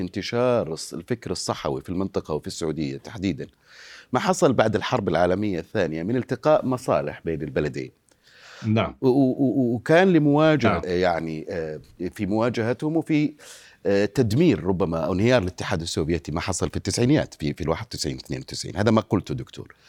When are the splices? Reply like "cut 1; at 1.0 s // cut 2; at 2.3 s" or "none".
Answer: cut 1; at 10.8 s